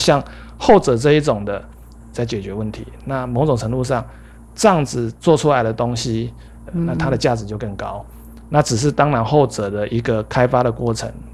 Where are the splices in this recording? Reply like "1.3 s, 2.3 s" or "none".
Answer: 2.1 s, 6.7 s